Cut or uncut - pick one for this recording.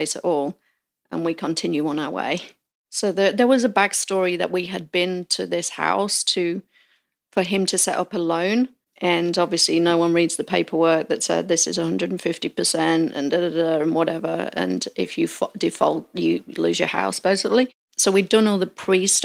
uncut